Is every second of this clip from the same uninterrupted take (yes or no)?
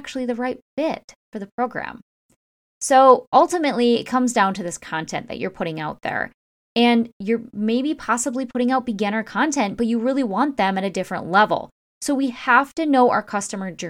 yes